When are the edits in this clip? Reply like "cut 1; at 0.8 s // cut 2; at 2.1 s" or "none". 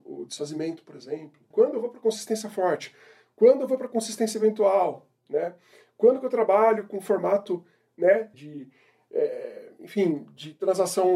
cut 1; at 1.5 s // cut 2; at 8.3 s